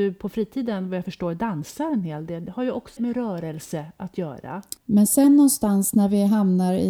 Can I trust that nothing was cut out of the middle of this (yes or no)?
no